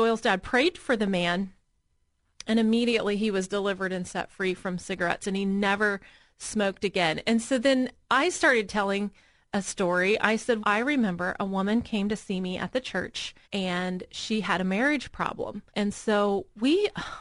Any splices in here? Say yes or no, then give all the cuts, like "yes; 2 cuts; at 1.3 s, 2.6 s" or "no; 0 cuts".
yes; 3 cuts; at 10.6 s, 13.4 s, 15.7 s